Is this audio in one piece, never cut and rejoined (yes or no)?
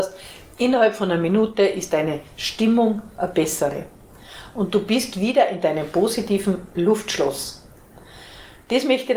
yes